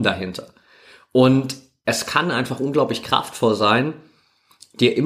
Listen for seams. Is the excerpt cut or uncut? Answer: uncut